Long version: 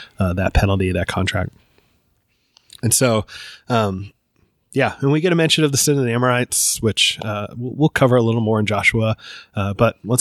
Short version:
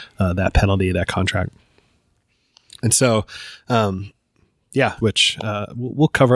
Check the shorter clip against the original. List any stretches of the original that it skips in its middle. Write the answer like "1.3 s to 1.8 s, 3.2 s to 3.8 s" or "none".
5.0 s to 6.8 s